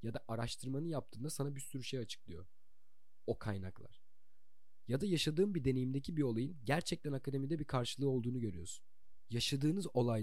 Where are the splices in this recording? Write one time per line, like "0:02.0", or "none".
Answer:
none